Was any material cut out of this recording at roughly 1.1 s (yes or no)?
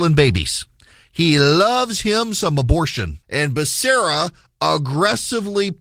no